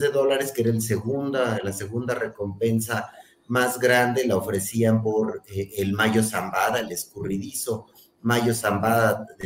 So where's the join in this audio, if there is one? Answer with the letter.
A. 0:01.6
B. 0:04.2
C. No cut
C